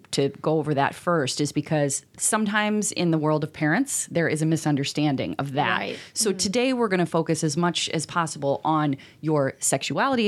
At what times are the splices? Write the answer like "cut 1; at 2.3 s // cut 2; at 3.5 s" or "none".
none